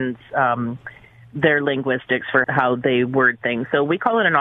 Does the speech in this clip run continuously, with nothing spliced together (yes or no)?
no